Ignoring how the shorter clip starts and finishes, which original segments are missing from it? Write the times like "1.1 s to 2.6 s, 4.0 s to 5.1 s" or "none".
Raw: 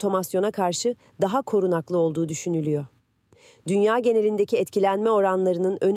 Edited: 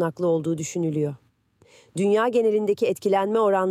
none